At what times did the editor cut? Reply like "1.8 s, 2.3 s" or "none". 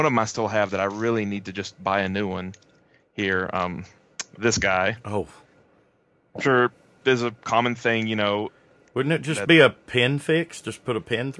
none